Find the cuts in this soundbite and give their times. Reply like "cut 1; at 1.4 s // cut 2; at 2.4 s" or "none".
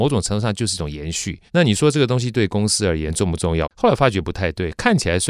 cut 1; at 1.5 s // cut 2; at 3.6 s